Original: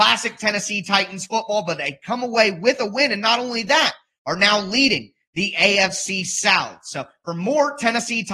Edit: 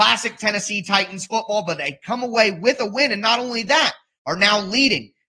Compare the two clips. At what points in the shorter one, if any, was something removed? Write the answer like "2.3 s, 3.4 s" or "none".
none